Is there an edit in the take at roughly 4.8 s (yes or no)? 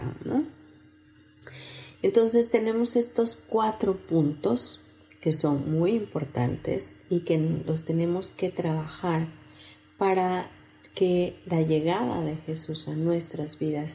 no